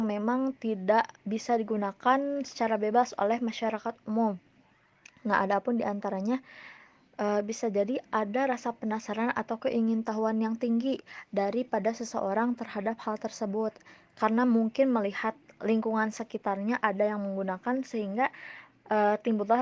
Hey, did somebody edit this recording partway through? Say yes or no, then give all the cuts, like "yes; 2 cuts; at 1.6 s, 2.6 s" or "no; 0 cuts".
no; 0 cuts